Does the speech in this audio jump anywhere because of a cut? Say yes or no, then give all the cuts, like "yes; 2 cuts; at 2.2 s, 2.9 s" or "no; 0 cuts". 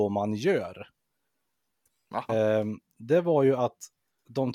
yes; 1 cut; at 2.3 s